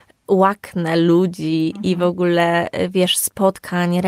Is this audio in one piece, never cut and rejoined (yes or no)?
yes